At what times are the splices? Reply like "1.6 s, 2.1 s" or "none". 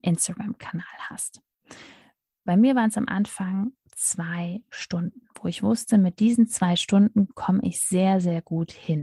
none